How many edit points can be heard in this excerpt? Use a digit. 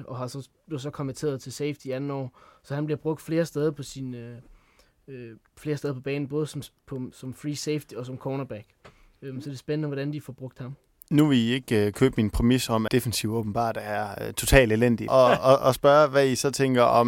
2